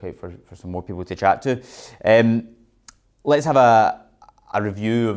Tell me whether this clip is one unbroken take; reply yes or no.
yes